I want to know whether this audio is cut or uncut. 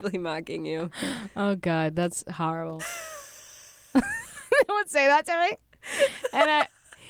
cut